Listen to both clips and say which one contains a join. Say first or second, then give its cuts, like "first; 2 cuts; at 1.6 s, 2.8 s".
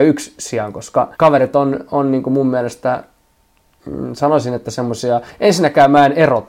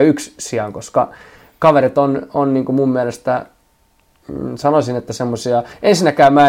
first; 1 cut; at 1.1 s